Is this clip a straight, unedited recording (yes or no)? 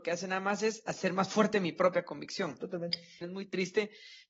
no